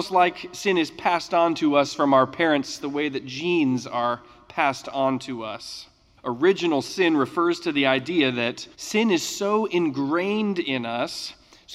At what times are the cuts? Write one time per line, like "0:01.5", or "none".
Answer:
0:06.2
0:08.7